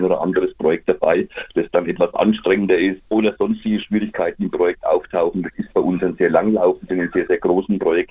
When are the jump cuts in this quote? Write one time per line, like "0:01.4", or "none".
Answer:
0:03.0